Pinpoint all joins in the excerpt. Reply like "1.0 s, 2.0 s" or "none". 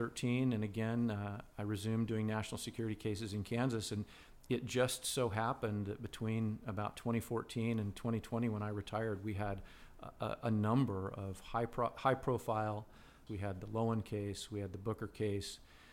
13.3 s